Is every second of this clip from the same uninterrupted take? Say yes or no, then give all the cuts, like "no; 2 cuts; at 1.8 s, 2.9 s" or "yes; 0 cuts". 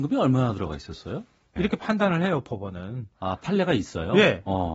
no; 1 cut; at 1.6 s